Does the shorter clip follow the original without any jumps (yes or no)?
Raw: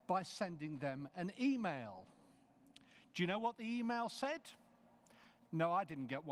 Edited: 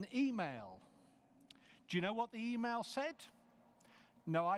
yes